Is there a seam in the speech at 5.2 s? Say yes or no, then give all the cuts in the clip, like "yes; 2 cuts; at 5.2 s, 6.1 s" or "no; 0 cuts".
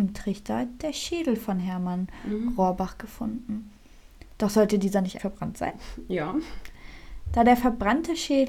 yes; 1 cut; at 5.2 s